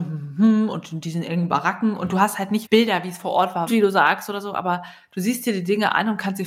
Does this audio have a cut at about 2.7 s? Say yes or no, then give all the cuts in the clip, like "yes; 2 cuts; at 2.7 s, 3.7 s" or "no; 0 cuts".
yes; 2 cuts; at 2.7 s, 3.7 s